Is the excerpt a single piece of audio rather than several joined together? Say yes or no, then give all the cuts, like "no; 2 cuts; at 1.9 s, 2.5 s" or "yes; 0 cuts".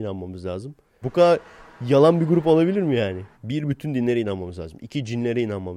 no; 2 cuts; at 1.0 s, 3.3 s